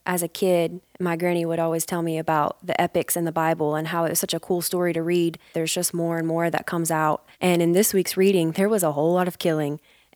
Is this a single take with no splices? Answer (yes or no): no